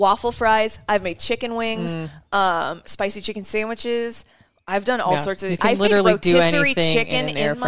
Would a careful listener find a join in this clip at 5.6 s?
no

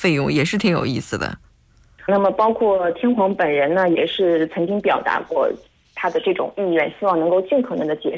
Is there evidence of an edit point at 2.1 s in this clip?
yes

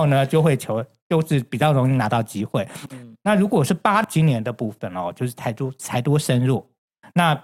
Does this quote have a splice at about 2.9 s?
yes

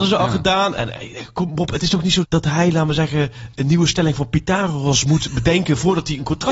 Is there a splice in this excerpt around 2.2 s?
yes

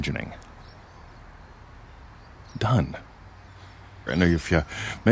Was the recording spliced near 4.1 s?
yes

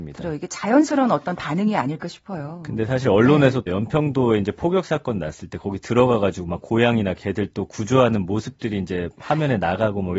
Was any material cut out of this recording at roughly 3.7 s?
yes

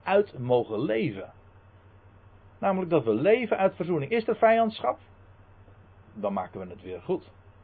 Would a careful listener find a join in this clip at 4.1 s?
no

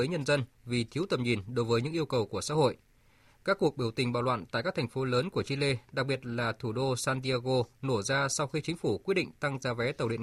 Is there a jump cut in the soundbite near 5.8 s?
no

